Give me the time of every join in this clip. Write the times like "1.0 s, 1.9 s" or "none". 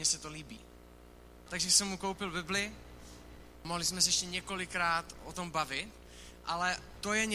none